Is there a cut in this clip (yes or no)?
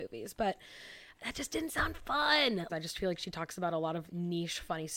yes